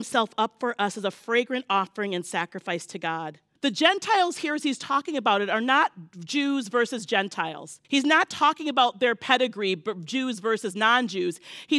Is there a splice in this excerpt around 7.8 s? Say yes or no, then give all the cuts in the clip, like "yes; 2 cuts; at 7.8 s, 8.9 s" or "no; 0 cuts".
yes; 2 cuts; at 3.6 s, 7.8 s